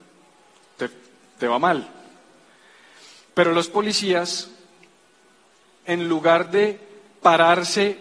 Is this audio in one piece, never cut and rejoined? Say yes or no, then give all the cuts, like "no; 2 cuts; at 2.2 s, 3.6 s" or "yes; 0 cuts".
yes; 0 cuts